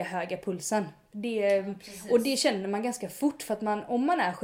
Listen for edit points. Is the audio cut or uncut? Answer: uncut